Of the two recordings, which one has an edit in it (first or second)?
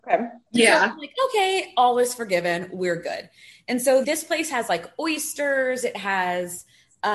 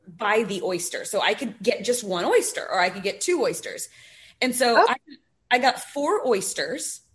first